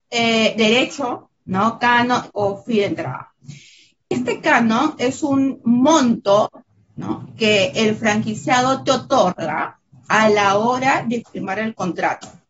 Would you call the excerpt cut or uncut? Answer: cut